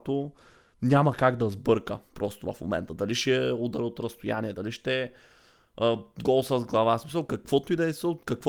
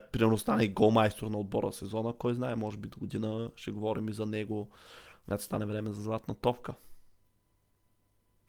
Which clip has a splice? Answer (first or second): first